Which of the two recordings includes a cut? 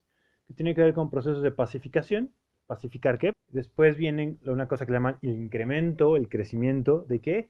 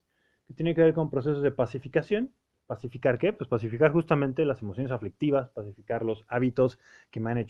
first; 1 cut; at 3.3 s

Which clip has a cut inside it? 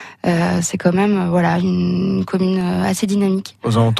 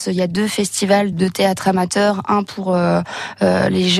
second; 1 cut; at 1.1 s

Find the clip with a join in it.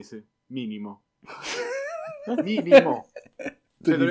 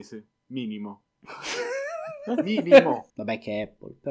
second; 1 cut; at 3.1 s

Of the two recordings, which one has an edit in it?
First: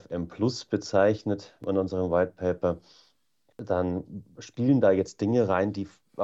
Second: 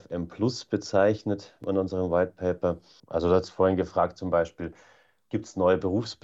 second; 1 cut; at 3.0 s

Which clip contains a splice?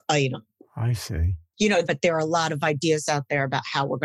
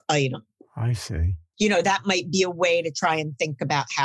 first; 1 cut; at 1.8 s

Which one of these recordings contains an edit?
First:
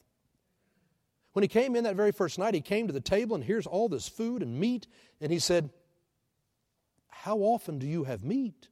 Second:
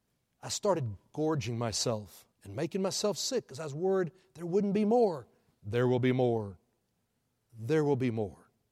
second; 2 cuts; at 2.3 s, 7.5 s

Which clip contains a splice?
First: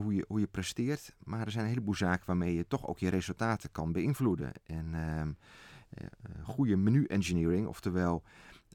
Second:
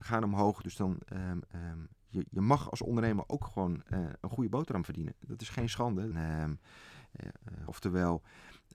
second; 2 cuts; at 6.1 s, 7.7 s

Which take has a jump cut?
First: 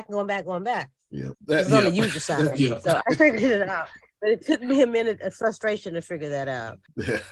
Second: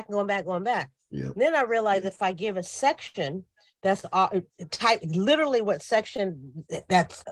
first; 1 cut; at 1.3 s

